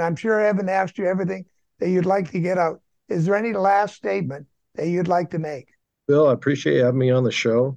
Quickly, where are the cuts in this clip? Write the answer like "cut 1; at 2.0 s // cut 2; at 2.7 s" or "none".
none